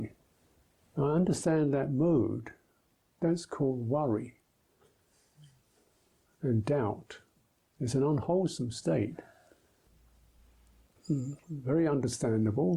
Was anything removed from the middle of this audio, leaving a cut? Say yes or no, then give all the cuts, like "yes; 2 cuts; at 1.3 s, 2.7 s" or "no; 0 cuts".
no; 0 cuts